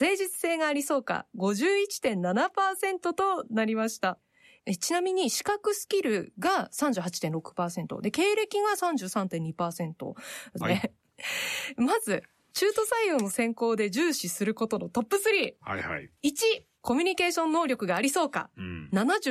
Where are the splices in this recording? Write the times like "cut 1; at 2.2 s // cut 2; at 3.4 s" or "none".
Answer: cut 1; at 10.6 s